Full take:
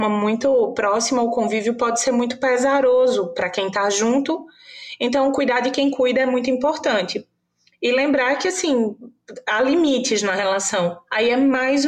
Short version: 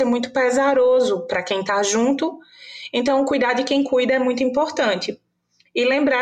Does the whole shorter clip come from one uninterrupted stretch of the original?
yes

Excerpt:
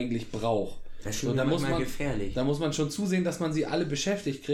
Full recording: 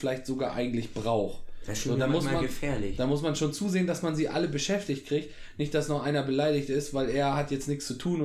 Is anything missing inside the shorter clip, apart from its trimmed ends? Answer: no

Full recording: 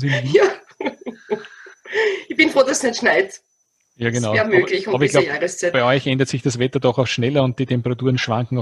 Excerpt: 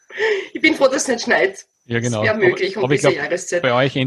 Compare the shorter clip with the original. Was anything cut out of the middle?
yes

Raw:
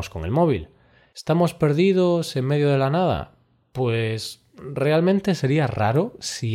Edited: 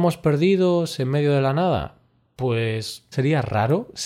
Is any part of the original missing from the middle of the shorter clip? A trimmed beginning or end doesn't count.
yes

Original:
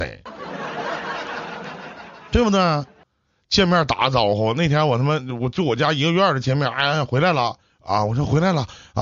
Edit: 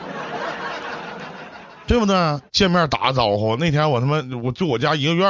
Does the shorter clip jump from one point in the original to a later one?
yes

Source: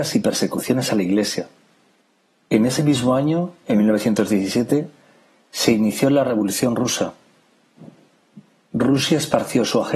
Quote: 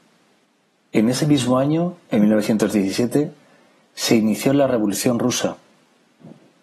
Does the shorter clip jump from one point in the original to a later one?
no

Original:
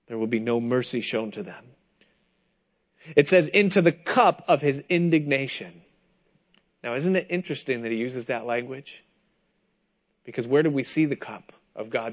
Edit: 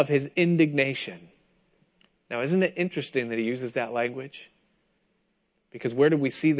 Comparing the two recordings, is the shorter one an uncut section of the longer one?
yes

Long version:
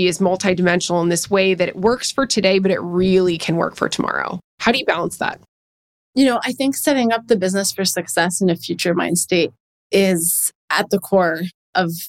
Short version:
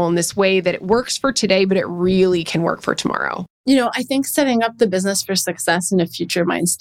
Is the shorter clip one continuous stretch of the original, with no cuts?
no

